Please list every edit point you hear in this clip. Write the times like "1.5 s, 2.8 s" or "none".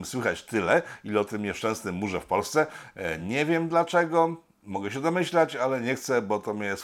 none